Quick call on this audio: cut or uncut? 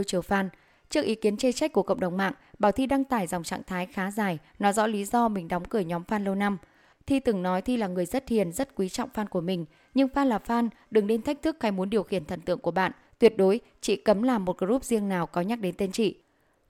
cut